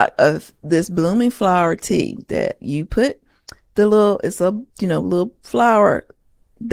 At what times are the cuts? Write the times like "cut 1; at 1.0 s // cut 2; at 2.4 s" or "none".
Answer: cut 1; at 4.7 s